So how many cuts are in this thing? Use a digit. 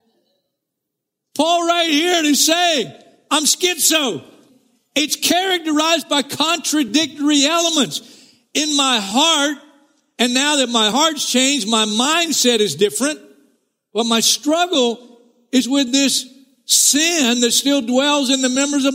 0